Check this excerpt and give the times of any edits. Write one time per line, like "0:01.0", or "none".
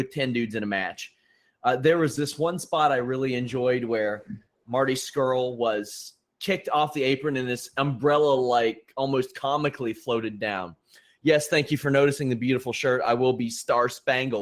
none